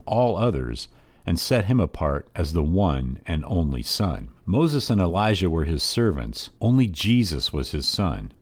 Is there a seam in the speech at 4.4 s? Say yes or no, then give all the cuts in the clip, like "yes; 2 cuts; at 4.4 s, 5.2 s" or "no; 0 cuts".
yes; 2 cuts; at 4.4 s, 6.6 s